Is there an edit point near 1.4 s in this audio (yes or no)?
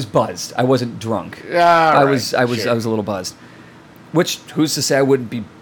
no